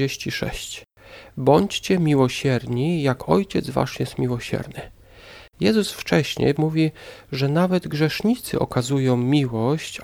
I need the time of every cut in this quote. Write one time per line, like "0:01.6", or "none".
0:05.5
0:06.6